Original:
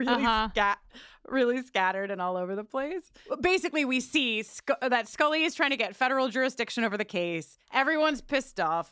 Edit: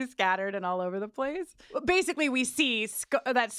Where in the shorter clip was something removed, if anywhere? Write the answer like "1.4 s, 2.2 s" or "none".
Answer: none